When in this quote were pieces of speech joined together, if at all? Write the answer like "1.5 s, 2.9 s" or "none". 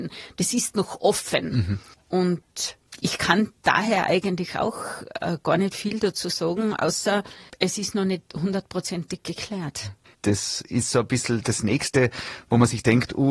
10.1 s

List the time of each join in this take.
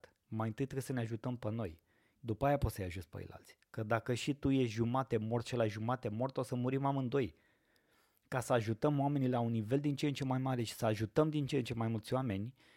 2.1 s

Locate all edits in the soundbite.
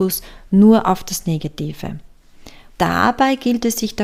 2.7 s

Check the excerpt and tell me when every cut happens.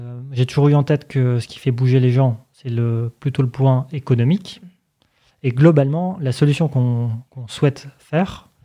5.3 s

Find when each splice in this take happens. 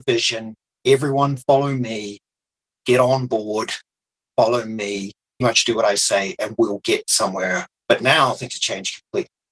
5.4 s, 7.8 s

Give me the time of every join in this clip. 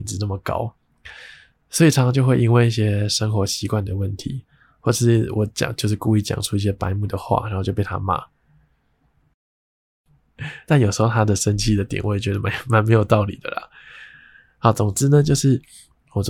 none

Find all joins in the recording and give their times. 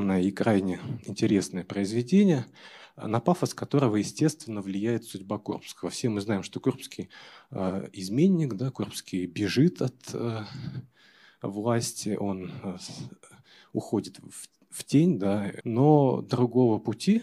15.6 s

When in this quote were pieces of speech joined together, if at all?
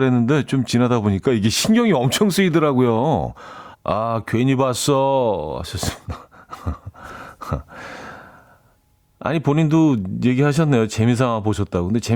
3.7 s

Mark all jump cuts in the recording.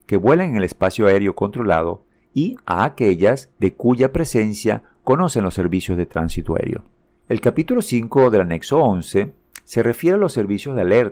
7.1 s

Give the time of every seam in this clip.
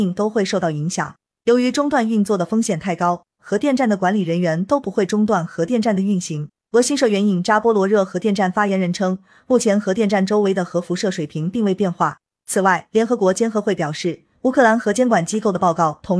3.4 s, 6.7 s

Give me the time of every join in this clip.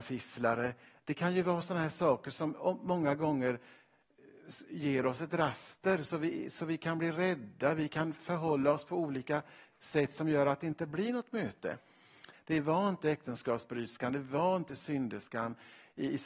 12.3 s

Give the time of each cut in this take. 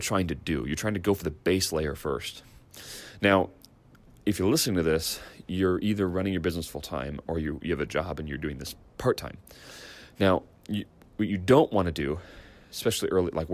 none

